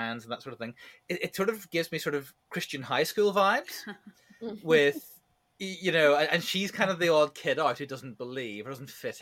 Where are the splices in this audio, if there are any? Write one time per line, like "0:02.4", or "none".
none